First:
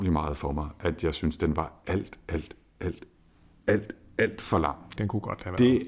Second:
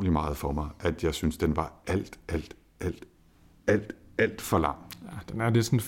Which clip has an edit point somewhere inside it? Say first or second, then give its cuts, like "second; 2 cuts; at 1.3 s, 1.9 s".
first; 1 cut; at 5.0 s